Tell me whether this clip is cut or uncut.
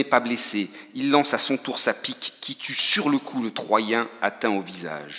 uncut